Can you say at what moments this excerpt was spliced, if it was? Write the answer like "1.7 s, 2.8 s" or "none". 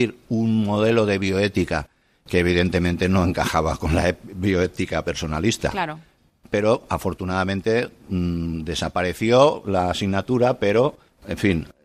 none